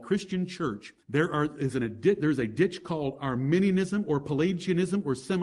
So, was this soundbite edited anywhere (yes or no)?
yes